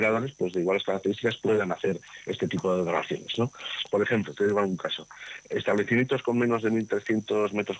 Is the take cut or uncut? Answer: cut